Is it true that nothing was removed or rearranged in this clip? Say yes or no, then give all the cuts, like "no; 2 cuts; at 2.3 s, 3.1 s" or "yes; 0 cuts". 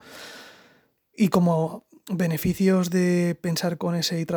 yes; 0 cuts